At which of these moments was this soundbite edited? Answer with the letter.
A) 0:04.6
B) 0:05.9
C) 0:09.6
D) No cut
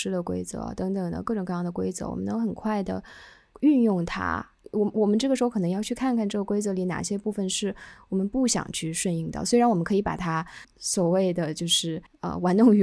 A